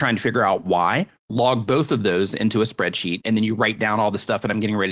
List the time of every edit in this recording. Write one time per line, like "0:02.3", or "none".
0:01.2
0:03.2